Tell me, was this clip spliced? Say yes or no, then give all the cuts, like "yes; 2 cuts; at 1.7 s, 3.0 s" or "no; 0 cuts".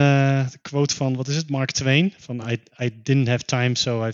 no; 0 cuts